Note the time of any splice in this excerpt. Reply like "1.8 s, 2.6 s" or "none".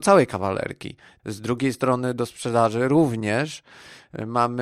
1.2 s